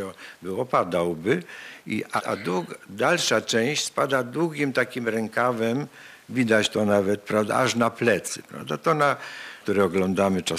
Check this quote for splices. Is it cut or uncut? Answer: cut